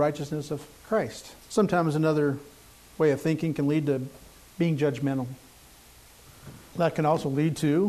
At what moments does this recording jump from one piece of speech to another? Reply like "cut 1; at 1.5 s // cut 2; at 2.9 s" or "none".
cut 1; at 1.4 s // cut 2; at 6.7 s